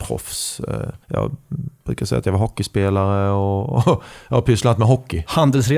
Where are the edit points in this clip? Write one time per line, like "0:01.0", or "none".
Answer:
0:01.0